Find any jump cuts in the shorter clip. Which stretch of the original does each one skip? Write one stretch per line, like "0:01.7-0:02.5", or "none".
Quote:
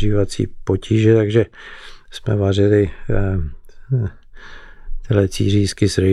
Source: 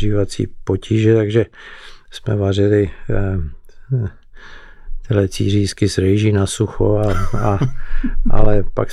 none